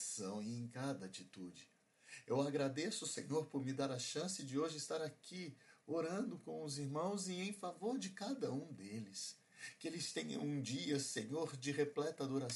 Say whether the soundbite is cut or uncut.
uncut